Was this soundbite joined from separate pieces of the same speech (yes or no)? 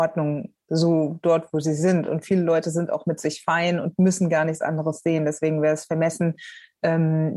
no